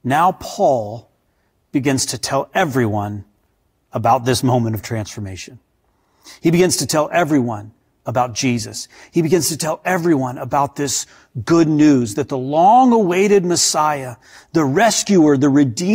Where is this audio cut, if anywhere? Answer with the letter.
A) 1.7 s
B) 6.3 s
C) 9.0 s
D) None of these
D